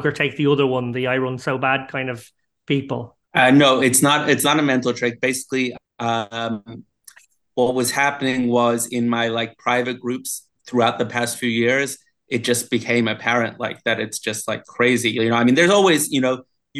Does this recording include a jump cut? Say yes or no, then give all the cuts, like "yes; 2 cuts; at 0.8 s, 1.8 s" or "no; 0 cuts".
yes; 1 cut; at 3.2 s